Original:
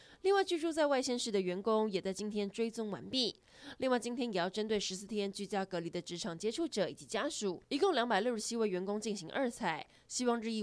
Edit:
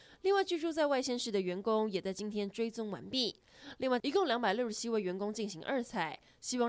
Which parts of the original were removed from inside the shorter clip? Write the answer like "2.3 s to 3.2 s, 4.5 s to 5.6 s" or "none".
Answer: 4.0 s to 7.7 s